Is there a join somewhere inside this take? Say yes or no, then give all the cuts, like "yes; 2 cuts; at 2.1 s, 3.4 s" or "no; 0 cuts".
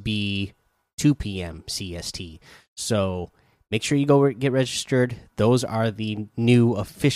no; 0 cuts